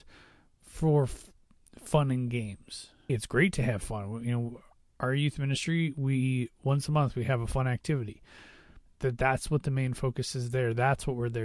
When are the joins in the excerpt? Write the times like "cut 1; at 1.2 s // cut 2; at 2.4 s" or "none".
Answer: cut 1; at 3.1 s // cut 2; at 8.9 s